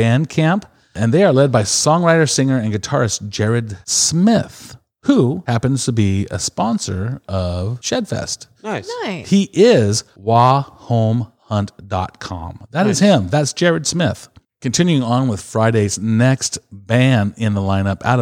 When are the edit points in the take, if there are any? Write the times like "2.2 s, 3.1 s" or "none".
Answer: 14.4 s